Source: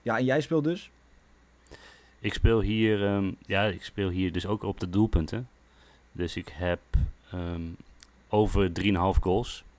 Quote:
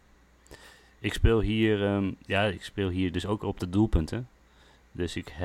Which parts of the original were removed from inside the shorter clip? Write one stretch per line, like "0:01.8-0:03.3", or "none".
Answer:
none